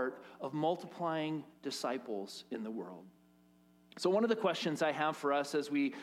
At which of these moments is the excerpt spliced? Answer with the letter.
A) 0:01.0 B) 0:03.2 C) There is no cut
C